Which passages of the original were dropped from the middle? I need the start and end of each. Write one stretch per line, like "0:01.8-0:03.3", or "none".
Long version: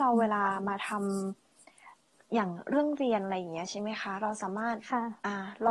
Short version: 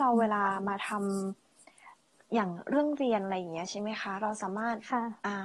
none